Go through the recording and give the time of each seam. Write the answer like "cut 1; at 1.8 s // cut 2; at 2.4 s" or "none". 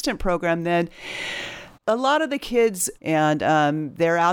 cut 1; at 1.7 s // cut 2; at 3.0 s